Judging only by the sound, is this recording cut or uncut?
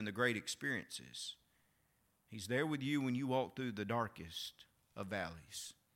uncut